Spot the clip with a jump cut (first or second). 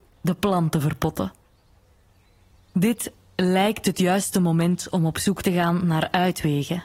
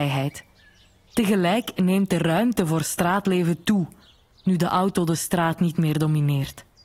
second